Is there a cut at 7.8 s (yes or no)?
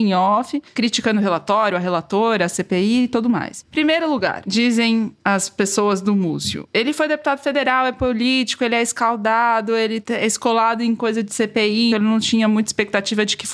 no